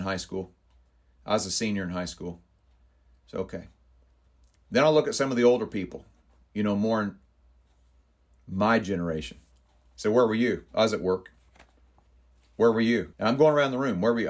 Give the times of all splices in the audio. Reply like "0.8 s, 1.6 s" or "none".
13.1 s